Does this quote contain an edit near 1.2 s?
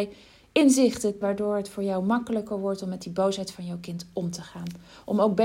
yes; 1 cut; at 1.2 s

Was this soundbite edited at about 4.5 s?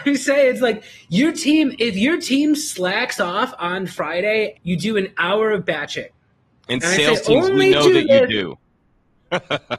yes; 1 cut; at 4.5 s

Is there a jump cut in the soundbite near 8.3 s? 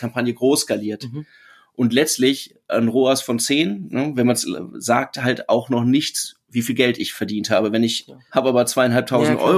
yes; 1 cut; at 8.3 s

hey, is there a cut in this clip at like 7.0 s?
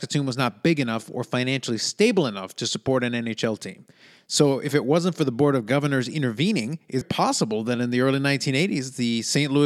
yes; 1 cut; at 7.0 s

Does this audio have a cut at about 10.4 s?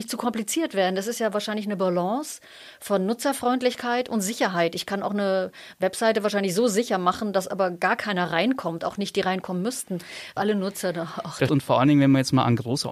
yes; 2 cuts; at 10.4 s, 11.5 s

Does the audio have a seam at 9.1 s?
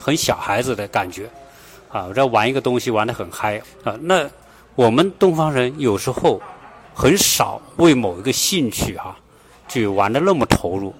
no; 1 cut; at 3.6 s

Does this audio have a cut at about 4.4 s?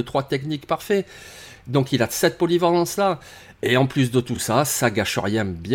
no; 0 cuts

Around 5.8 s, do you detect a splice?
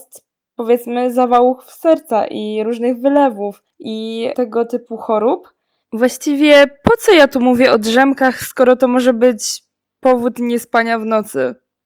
yes; 1 cut; at 5.8 s

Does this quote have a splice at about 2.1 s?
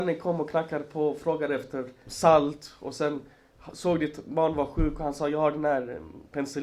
yes; 1 cut; at 2.1 s

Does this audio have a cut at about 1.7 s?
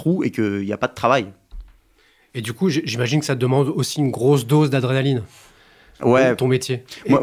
no; 0 cuts

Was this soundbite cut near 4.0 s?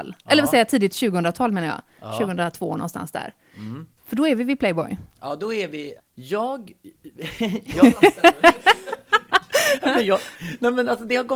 yes; 2 cuts; at 4.0 s, 6.0 s

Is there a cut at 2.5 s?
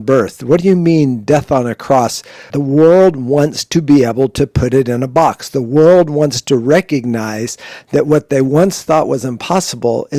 yes; 1 cut; at 2.5 s

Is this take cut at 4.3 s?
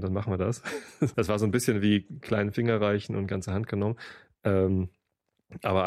no; 1 cut; at 1.1 s

